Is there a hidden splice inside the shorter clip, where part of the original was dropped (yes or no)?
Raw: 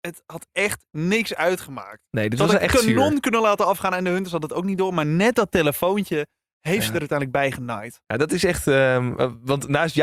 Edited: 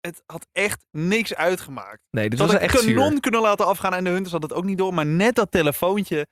no